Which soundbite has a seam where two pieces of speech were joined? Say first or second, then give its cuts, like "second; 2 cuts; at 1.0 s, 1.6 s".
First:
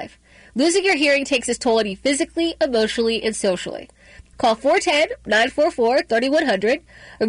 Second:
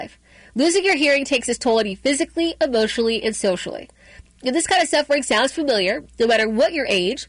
first; 1 cut; at 4.3 s